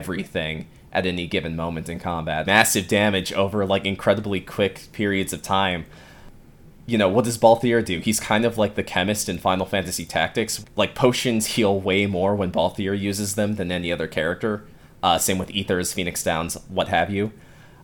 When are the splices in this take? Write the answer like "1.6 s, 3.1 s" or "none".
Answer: 2.5 s, 10.6 s